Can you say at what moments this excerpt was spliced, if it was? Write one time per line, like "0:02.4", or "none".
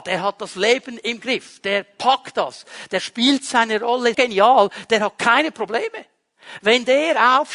0:04.1